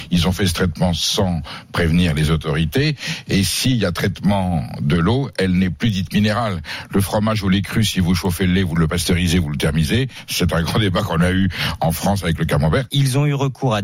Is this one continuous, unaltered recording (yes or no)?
no